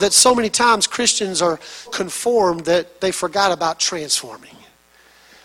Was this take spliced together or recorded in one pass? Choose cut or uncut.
cut